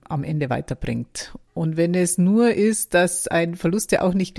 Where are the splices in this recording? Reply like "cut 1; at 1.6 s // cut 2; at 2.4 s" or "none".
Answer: cut 1; at 1.5 s